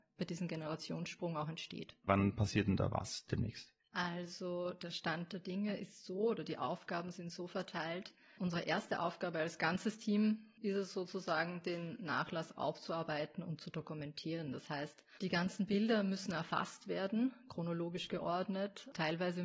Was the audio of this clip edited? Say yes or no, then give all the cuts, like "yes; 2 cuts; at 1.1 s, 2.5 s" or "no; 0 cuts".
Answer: yes; 1 cut; at 2.1 s